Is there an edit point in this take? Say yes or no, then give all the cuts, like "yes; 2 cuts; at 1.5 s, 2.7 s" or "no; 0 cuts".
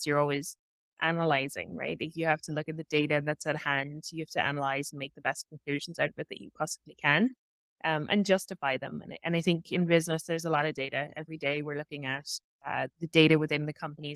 yes; 1 cut; at 12.6 s